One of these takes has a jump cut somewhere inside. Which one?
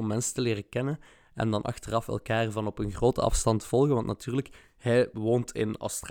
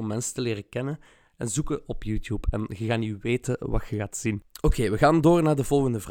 second; 1 cut; at 1.3 s

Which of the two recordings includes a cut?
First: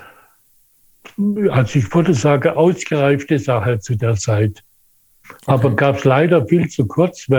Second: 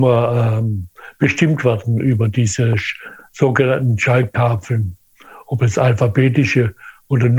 first; 1 cut; at 5.2 s

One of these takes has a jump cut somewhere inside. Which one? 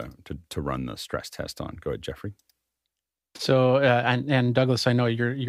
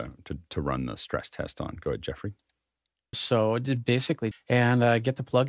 second; 2 cuts; at 3.1 s, 4.3 s

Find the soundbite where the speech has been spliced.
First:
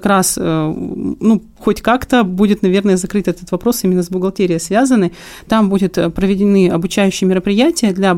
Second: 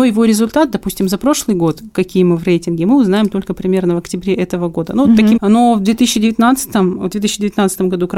second; 1 cut; at 5.4 s

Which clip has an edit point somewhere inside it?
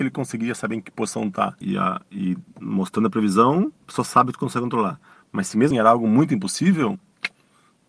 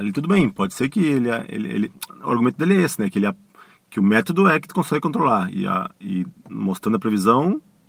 first; 3 cuts; at 1.6 s, 3.8 s, 5.7 s

